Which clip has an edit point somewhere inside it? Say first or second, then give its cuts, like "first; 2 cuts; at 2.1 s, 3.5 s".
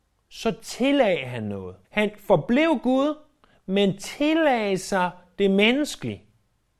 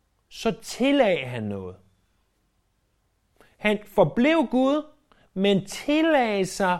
first; 1 cut; at 1.8 s